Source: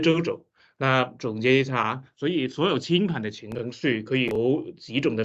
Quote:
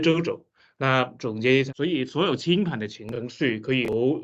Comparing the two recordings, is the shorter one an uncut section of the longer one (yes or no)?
no